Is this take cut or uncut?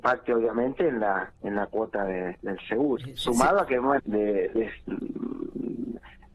cut